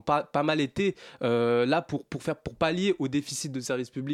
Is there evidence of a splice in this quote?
no; 0 cuts

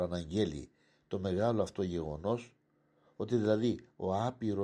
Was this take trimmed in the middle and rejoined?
no; 0 cuts

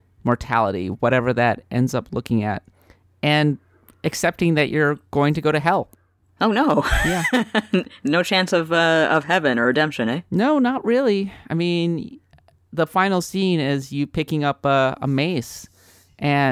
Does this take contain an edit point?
no; 0 cuts

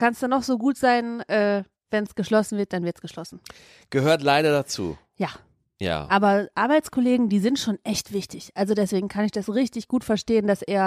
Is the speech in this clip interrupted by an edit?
no; 0 cuts

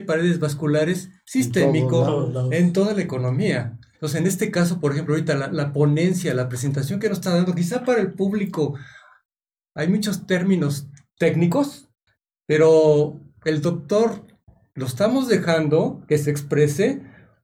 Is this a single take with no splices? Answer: no; 1 cut; at 3.9 s

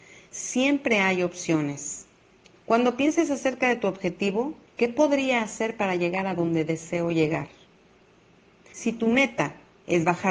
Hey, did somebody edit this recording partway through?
yes; 3 cuts; at 2.6 s, 4.7 s, 8.7 s

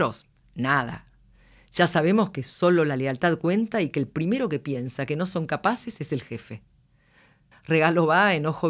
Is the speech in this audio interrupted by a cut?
yes; 1 cut; at 7.5 s

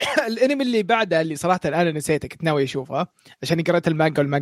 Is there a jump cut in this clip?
no; 0 cuts

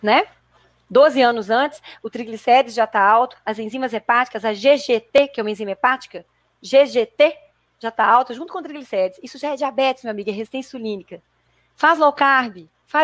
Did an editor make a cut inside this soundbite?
no; 0 cuts

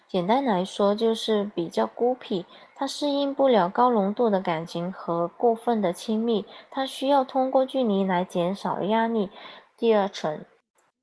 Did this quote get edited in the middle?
yes; 1 cut; at 9.7 s

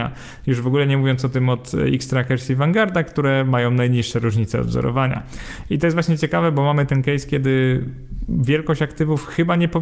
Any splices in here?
no; 0 cuts

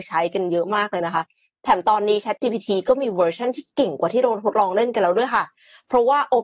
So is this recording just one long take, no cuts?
yes; 0 cuts

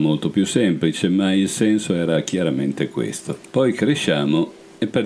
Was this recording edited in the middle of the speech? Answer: no; 0 cuts

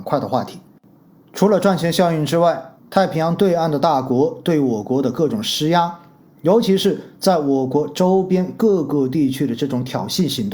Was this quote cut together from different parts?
yes; 1 cut; at 2.8 s

